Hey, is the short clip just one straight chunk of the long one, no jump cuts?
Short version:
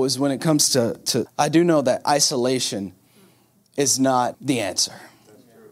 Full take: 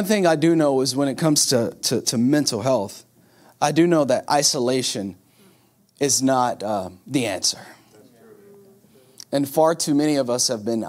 no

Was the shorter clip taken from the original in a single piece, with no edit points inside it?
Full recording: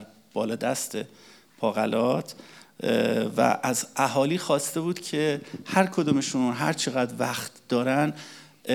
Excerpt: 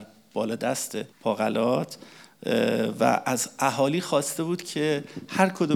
no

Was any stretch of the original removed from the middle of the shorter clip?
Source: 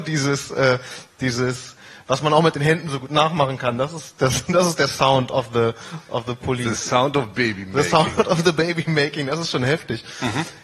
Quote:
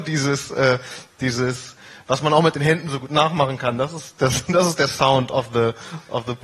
no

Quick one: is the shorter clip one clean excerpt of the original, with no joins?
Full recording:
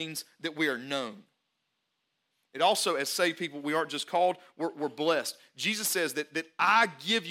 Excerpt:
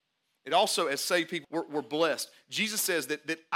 no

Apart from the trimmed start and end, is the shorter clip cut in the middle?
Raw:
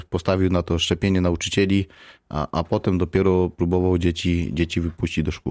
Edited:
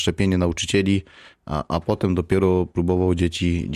no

